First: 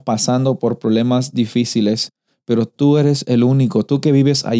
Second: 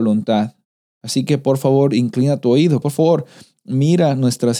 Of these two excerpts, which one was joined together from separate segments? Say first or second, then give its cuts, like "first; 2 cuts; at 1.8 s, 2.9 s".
second; 1 cut; at 2.8 s